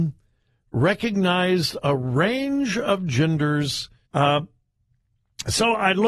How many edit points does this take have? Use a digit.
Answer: 1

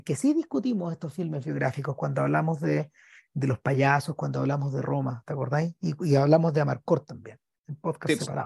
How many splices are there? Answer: 0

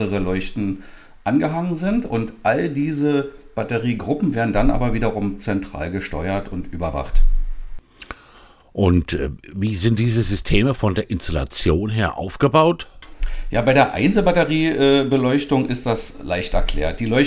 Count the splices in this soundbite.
0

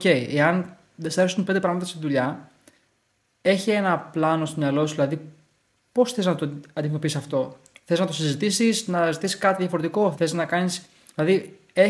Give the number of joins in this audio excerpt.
1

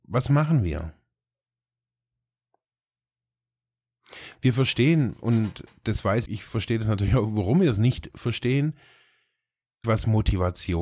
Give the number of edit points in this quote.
2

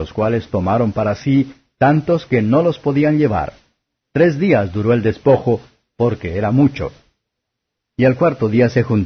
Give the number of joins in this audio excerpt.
0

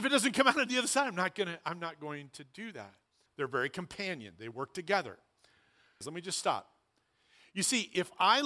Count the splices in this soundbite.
2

